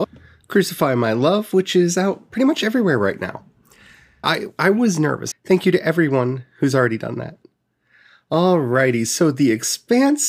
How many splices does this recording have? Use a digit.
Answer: 2